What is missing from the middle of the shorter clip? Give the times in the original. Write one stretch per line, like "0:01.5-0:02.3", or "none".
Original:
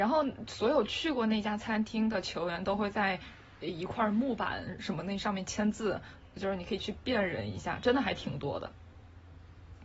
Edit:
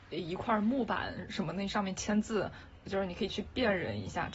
none